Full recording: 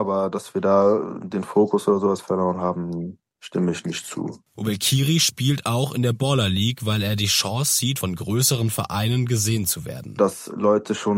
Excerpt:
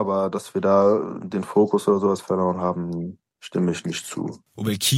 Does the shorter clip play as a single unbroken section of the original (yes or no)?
yes